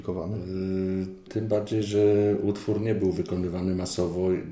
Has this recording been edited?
yes; 1 cut; at 1.3 s

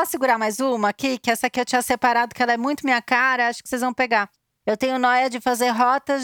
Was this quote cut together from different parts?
no; 0 cuts

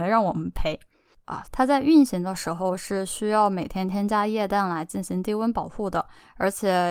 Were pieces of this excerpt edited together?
yes; 1 cut; at 1.4 s

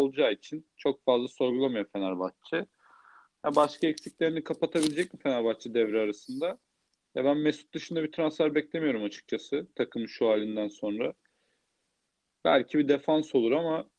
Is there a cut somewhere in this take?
no; 0 cuts

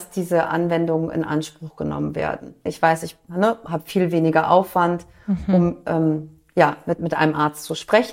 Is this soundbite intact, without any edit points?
no; 2 cuts; at 2.7 s, 7.0 s

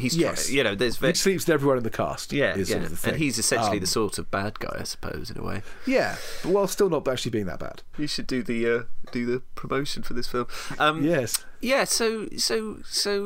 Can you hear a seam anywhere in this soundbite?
yes; 2 cuts; at 1.1 s, 7.9 s

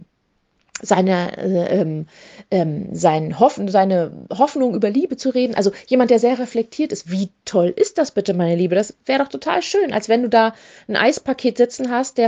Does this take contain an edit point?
no; 0 cuts

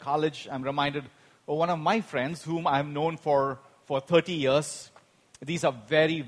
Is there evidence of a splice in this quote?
no; 0 cuts

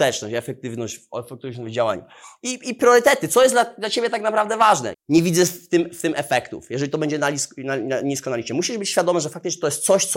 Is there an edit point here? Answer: yes; 1 cut; at 4.9 s

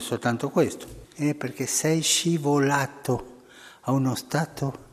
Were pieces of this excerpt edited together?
yes; 1 cut; at 1.0 s

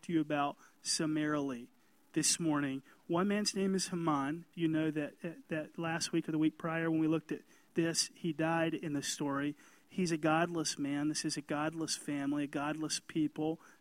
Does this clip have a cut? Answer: yes; 1 cut; at 4.5 s

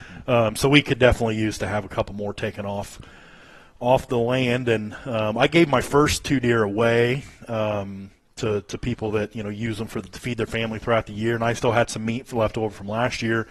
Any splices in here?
no; 0 cuts

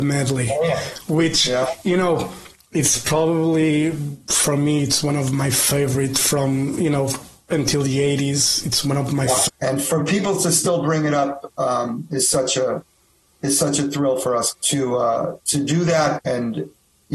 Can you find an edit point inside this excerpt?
yes; 3 cuts; at 9.5 s, 14.5 s, 16.2 s

